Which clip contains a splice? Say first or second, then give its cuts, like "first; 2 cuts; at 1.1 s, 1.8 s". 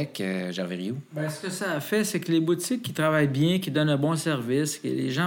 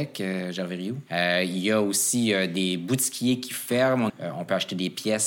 second; 2 cuts; at 1.1 s, 4.1 s